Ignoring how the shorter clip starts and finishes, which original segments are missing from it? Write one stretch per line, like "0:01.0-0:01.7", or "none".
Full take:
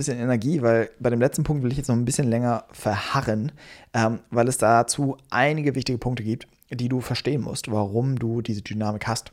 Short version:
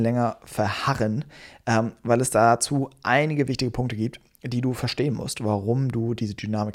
none